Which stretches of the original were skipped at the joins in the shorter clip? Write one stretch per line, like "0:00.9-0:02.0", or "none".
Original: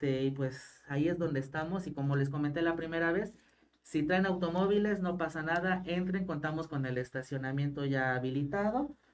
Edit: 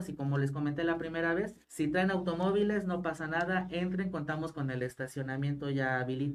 0:03.4-0:03.8